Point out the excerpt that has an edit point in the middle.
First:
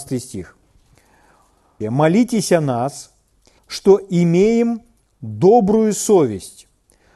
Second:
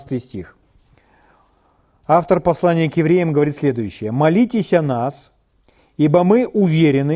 first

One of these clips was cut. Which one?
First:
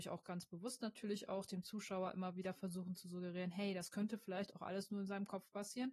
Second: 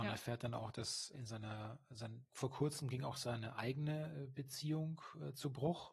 second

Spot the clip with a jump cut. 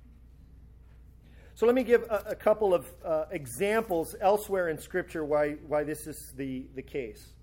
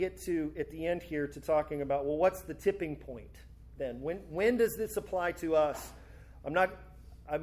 second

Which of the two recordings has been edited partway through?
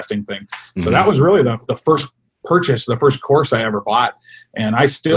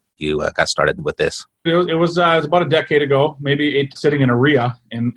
second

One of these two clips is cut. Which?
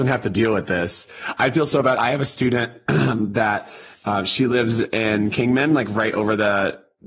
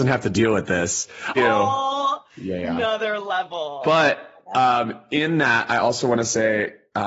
second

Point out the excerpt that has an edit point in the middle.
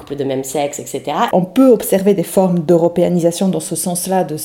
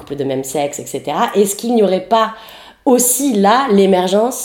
first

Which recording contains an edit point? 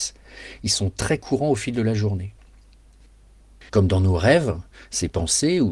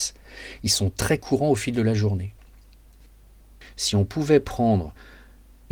first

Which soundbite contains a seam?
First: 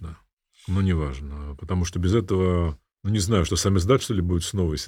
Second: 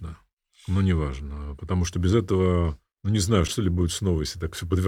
second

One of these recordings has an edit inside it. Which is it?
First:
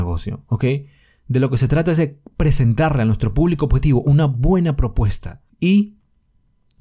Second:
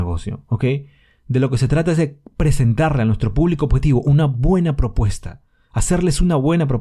first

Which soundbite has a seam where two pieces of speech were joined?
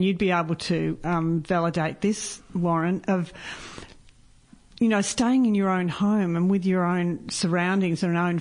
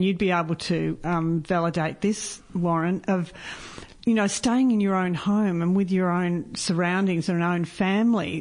second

